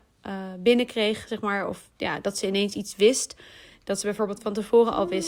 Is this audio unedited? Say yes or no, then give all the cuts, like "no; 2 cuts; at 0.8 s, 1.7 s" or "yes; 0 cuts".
yes; 0 cuts